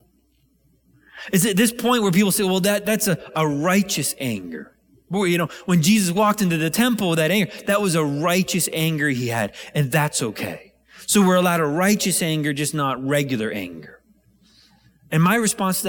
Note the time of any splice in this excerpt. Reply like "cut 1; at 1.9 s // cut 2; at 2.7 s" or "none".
none